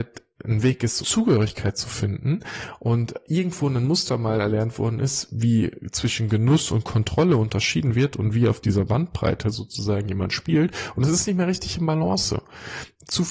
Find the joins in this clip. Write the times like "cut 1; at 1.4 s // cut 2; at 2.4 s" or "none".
cut 1; at 1.0 s